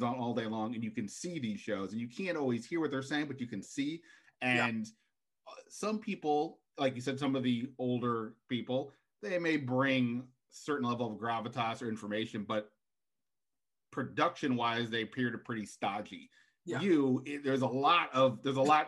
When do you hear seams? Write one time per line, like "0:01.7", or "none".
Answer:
none